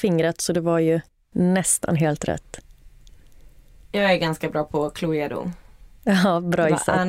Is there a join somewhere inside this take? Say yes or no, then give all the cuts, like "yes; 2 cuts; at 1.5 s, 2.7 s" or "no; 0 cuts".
no; 0 cuts